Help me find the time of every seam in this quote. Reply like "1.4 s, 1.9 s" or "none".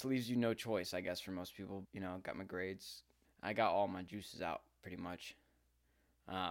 1.8 s, 3.2 s